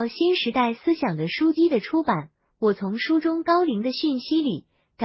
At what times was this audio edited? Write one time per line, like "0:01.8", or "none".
0:01.6